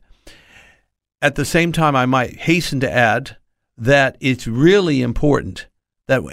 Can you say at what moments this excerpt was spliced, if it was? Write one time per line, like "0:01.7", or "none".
none